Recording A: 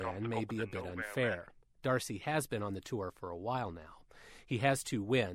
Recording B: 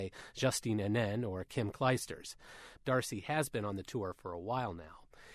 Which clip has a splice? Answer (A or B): B